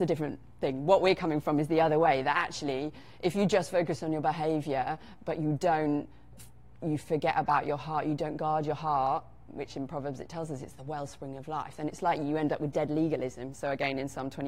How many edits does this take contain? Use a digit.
1